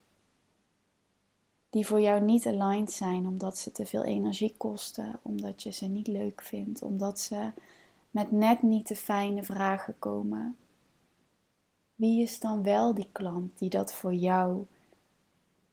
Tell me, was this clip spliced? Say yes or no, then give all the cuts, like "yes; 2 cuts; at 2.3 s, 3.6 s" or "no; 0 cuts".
no; 0 cuts